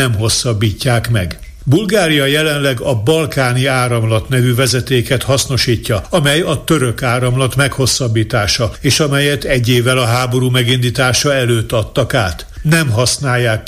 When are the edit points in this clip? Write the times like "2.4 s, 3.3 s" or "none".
none